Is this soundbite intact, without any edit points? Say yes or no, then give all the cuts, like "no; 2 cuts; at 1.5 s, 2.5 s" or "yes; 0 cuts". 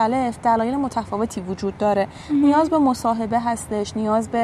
yes; 0 cuts